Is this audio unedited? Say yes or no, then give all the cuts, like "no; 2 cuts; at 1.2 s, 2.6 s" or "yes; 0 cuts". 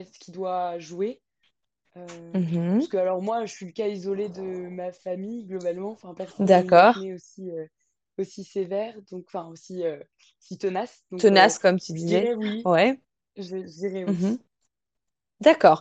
yes; 0 cuts